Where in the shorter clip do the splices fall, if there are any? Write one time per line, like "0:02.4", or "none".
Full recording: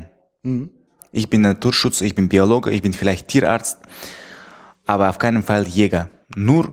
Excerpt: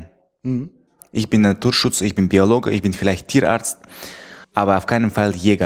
0:04.4